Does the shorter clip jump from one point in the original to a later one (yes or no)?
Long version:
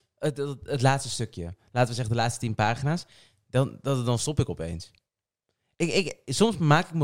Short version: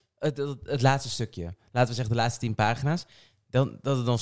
no